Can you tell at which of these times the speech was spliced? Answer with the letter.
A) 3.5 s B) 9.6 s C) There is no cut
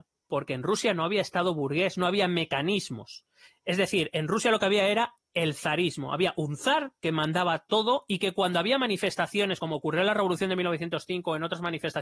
C